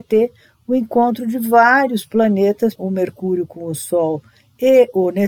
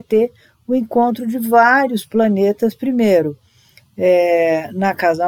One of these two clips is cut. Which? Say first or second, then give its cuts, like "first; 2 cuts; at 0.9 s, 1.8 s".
first; 1 cut; at 2.8 s